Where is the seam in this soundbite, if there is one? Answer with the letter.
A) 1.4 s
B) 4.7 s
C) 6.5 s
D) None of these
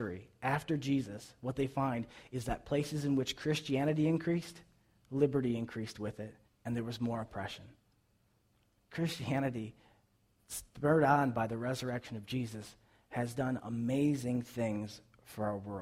C